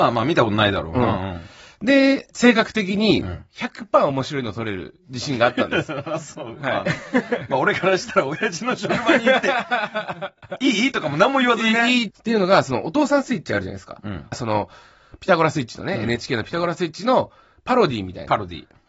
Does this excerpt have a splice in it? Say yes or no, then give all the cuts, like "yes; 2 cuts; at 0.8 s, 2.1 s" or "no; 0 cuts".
yes; 2 cuts; at 12.1 s, 14.3 s